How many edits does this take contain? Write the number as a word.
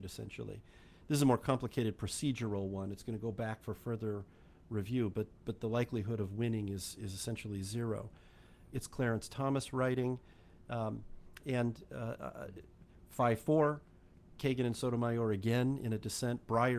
two